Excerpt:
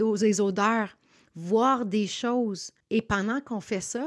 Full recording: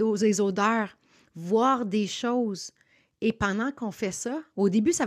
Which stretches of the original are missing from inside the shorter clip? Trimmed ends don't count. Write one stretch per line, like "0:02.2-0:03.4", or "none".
0:02.8-0:03.1